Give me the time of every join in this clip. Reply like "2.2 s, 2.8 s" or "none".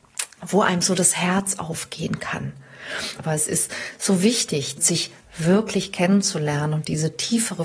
3.2 s, 4.8 s